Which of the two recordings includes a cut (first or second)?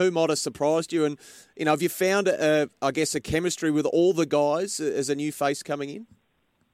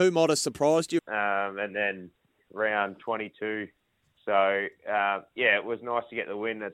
second